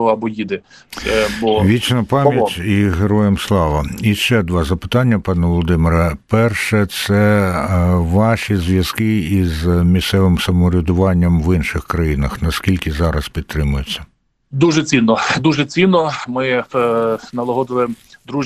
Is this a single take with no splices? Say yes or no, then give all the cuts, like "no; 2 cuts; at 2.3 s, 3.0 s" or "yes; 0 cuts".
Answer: yes; 0 cuts